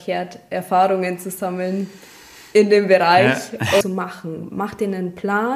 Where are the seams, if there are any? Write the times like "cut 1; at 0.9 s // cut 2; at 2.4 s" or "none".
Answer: cut 1; at 3.8 s